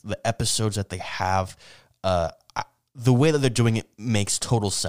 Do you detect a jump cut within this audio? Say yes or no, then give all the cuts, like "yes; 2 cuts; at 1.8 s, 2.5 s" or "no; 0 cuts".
no; 0 cuts